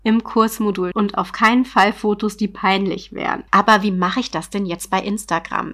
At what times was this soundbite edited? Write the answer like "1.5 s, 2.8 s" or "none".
0.9 s, 3.5 s

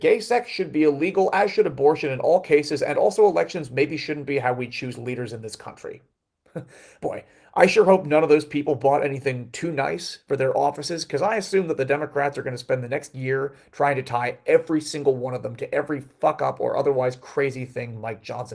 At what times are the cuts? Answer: none

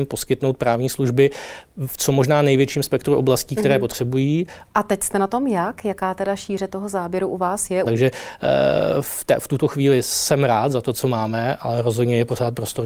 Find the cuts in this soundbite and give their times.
4.6 s, 7.8 s

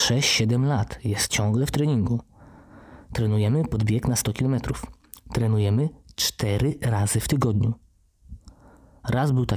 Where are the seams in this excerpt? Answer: none

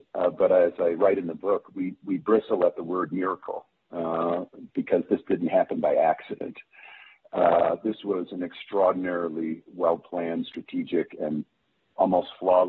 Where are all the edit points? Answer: none

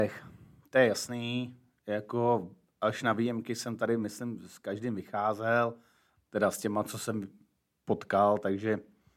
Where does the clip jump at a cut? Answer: none

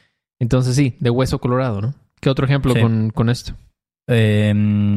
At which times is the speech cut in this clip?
none

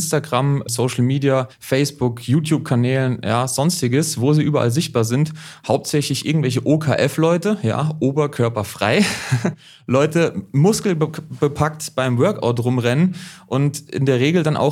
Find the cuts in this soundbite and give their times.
none

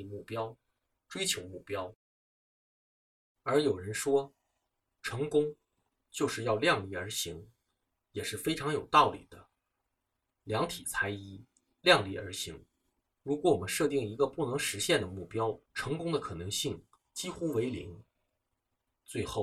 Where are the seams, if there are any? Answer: 13.0 s, 15.6 s

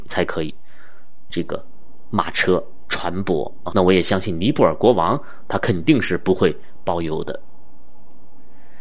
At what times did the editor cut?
1.3 s, 3.7 s

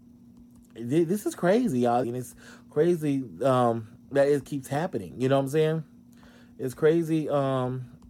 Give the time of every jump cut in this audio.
2.0 s, 4.0 s

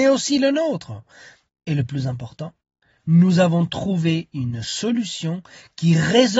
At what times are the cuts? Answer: none

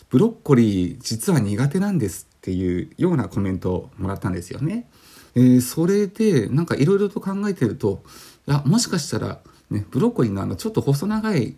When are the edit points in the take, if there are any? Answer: 5.3 s

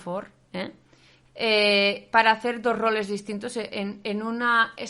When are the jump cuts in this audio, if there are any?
1.3 s

